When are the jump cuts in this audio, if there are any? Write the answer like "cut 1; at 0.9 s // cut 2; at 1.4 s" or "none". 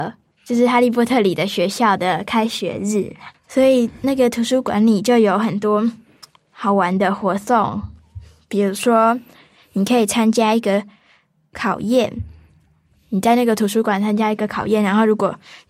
none